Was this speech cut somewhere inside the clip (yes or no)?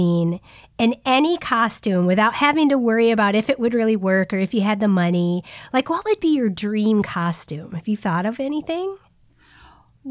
no